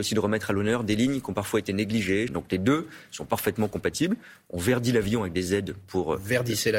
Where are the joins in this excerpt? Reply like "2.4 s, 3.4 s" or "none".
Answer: 2.3 s